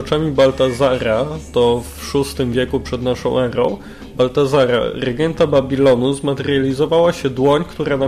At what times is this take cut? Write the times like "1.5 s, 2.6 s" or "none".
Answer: none